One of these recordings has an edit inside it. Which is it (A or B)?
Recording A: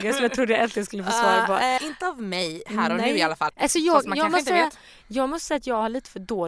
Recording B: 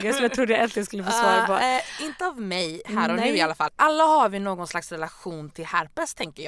A